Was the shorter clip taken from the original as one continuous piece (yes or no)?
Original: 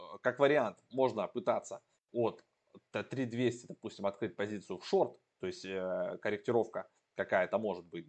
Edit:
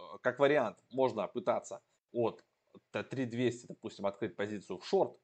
yes